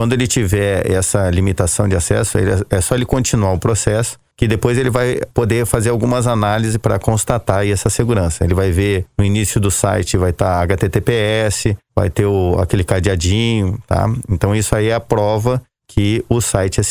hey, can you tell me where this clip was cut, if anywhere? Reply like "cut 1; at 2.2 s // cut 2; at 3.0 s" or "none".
none